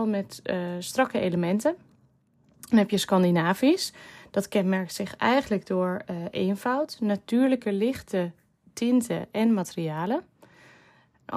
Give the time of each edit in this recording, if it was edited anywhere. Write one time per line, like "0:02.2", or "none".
none